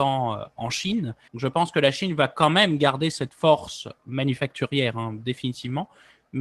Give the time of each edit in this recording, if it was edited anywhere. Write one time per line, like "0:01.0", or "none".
0:01.3